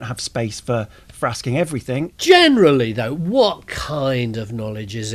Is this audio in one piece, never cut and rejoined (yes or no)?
yes